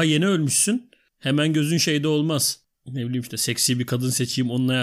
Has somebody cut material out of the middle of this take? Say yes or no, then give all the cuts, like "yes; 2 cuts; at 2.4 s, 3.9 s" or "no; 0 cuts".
no; 0 cuts